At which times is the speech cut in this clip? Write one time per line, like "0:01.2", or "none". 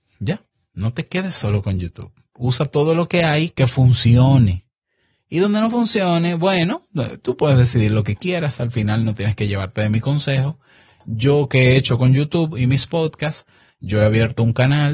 none

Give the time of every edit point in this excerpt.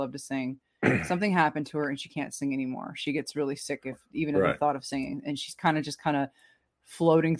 none

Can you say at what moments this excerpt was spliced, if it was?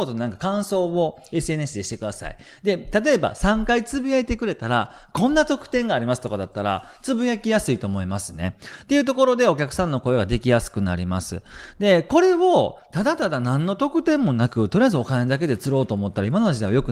none

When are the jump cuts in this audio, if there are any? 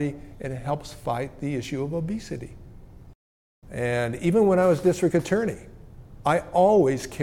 0:03.6

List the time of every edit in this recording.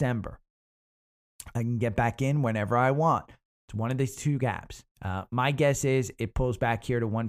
0:03.5
0:04.9

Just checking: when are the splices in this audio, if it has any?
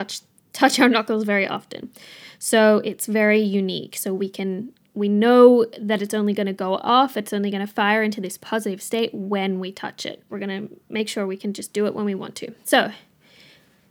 0:10.3

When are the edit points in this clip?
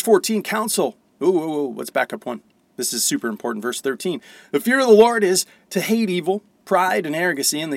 none

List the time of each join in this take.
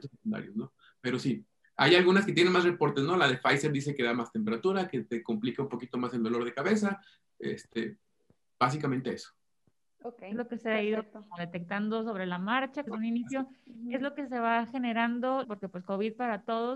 0:12.9
0:15.4

